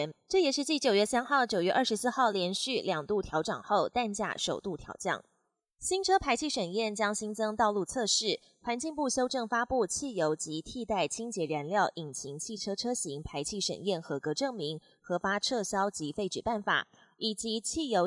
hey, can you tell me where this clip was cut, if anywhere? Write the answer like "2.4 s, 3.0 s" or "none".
none